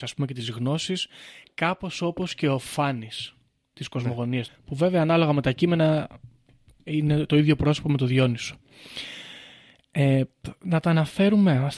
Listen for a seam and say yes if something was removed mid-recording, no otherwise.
yes